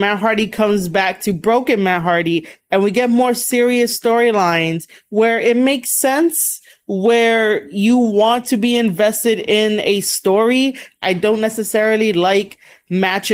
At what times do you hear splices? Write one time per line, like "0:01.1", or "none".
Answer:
0:11.0